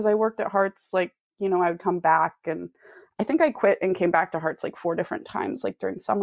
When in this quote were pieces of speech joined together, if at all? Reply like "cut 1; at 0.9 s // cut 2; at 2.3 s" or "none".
none